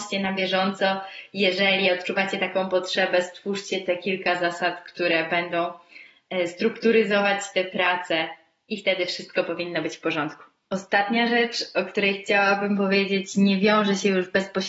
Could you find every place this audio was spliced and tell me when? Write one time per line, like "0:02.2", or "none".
none